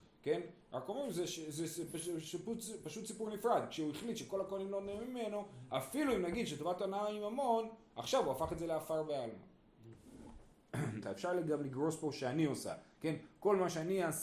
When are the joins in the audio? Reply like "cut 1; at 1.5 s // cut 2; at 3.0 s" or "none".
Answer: cut 1; at 11.0 s